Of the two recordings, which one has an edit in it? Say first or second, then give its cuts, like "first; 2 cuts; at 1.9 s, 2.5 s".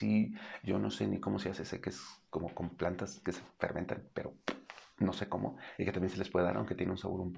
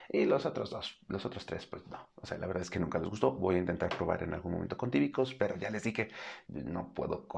second; 1 cut; at 6.4 s